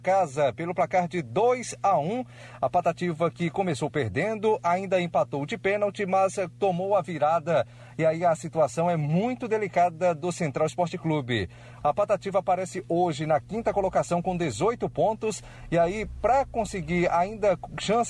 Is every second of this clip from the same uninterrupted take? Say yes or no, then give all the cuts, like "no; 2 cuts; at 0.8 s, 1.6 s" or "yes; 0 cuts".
no; 1 cut; at 11.8 s